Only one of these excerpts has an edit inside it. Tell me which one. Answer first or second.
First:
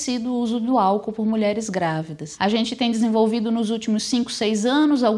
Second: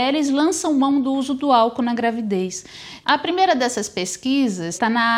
second